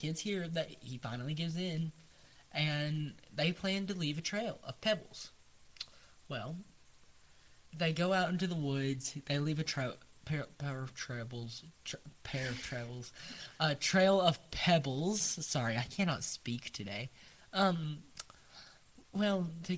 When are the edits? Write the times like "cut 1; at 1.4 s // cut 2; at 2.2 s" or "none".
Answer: cut 1; at 7.7 s